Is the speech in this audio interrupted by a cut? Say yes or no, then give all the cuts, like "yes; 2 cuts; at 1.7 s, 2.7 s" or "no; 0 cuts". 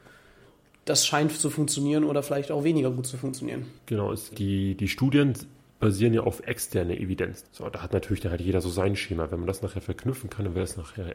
yes; 2 cuts; at 4.3 s, 7.4 s